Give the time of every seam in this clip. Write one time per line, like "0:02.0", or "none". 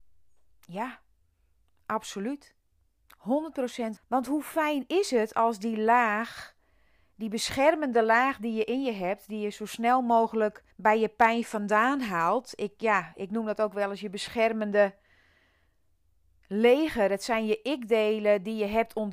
0:04.0
0:10.7